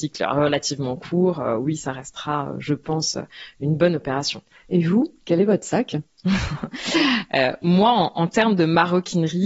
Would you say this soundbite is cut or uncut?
uncut